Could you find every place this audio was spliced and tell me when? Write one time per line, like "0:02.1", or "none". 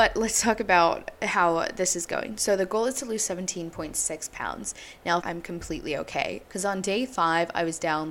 0:05.2
0:06.4